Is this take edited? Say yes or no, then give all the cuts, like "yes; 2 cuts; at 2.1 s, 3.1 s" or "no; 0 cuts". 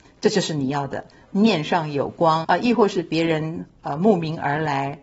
yes; 1 cut; at 2.4 s